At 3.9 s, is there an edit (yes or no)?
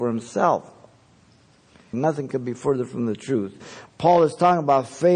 yes